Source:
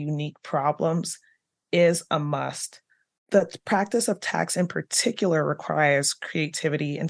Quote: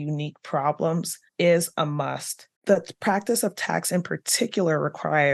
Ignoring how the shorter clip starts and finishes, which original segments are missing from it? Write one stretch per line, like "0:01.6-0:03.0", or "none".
0:01.3-0:01.6
0:02.9-0:03.2